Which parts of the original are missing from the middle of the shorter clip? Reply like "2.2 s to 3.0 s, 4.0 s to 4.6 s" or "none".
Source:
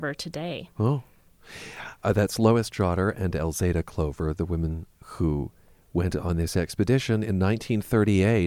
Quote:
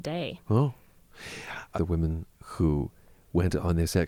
2.0 s to 4.3 s